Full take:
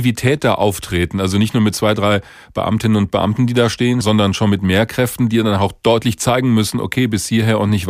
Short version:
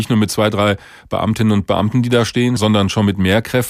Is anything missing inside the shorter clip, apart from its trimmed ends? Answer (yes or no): no